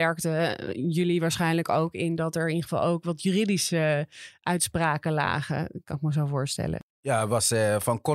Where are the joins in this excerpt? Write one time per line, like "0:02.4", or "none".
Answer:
none